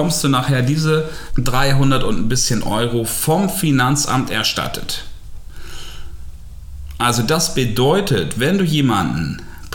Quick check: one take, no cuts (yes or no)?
no